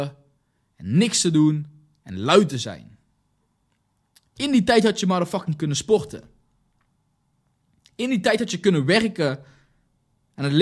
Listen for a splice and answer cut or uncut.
uncut